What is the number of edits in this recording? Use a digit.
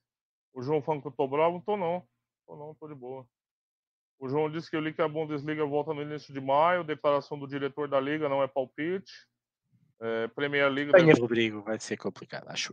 2